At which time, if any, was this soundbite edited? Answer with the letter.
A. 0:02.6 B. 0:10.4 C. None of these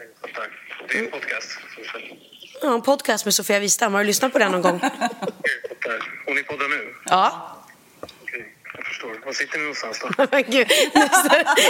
C